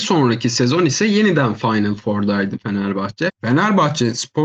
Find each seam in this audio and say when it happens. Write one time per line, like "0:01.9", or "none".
0:03.3